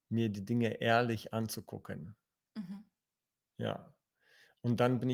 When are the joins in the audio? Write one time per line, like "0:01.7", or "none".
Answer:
none